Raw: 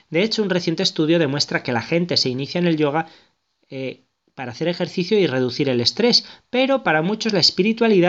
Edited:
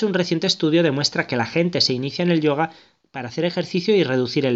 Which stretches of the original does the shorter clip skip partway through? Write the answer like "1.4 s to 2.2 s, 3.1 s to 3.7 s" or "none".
3.4 s to 4.3 s